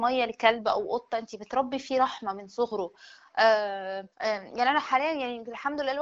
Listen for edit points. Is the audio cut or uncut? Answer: cut